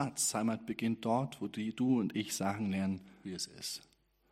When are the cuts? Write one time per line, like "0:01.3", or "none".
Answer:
0:03.2